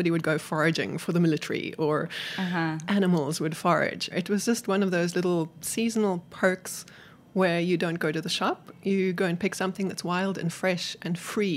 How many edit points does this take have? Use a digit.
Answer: 1